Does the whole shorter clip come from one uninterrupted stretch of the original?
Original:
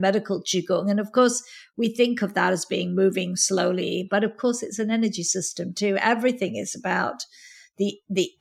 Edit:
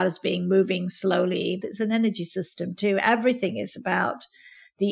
no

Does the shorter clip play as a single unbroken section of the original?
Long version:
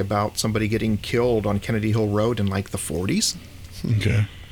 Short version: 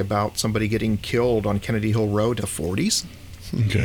no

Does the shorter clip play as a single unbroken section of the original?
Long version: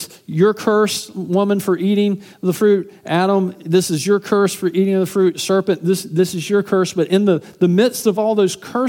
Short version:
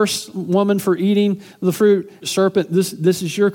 no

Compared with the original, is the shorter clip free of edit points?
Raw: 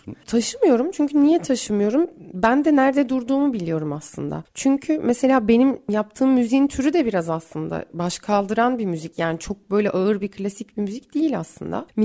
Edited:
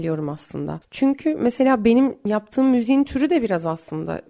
yes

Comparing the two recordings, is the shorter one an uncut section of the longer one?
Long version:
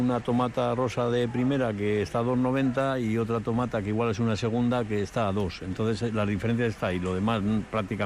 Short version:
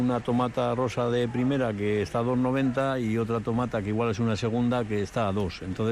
yes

